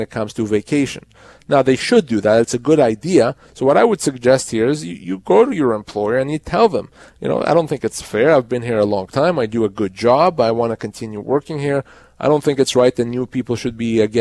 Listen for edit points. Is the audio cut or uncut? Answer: uncut